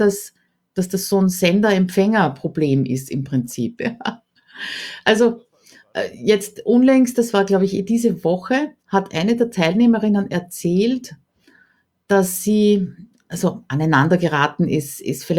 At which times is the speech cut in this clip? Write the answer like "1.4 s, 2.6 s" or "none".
3.8 s, 8.8 s